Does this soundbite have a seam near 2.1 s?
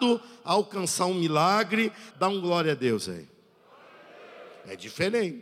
yes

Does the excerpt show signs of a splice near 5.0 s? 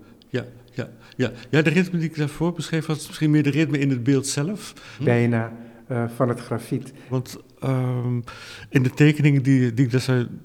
yes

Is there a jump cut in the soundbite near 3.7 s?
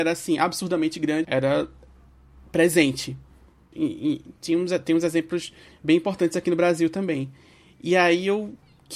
yes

